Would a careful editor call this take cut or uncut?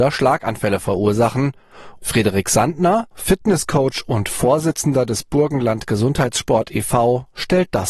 cut